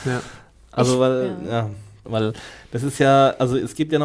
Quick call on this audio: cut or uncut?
cut